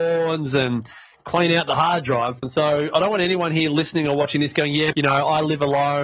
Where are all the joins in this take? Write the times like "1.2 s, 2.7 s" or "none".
2.4 s, 4.9 s